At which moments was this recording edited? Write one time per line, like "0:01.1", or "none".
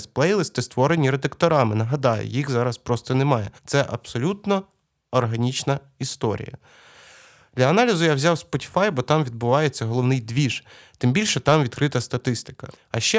0:03.6